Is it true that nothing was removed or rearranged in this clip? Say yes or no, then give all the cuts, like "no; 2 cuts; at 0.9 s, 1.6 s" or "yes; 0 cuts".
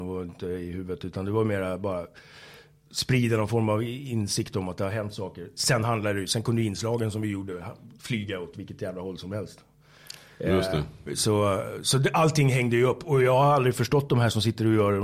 yes; 0 cuts